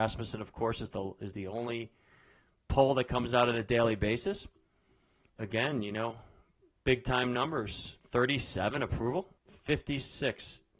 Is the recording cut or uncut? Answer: cut